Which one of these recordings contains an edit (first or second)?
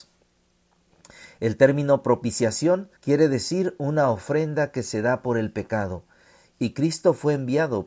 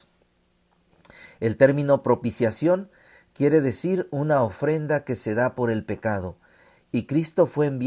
first